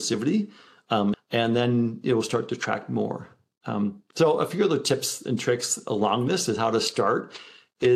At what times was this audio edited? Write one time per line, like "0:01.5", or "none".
0:01.1